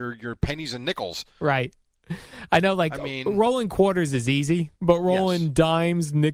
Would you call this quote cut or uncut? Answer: cut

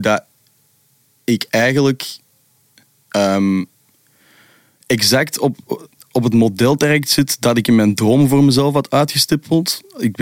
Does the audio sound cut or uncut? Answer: uncut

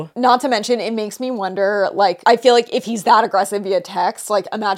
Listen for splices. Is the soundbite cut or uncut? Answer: uncut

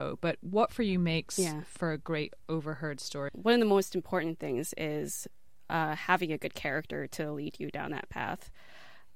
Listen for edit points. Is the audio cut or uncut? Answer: cut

